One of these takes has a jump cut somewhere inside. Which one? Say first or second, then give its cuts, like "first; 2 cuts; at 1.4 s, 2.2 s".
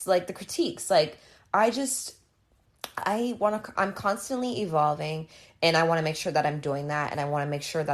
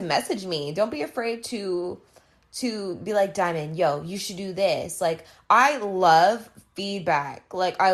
first; 1 cut; at 3.8 s